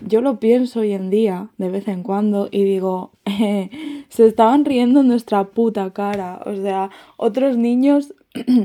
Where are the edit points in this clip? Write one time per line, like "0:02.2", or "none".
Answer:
none